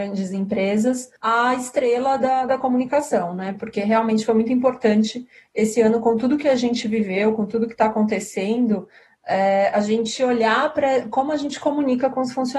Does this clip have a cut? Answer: yes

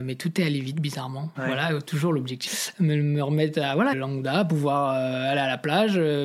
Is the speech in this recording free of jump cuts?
no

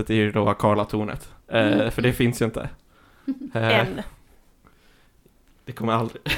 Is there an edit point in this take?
yes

